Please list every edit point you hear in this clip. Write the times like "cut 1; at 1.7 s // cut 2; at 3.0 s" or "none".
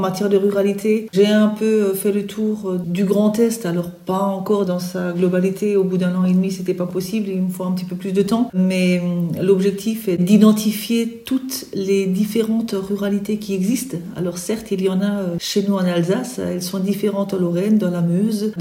none